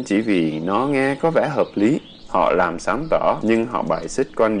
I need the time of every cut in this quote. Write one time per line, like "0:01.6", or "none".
0:02.2
0:03.4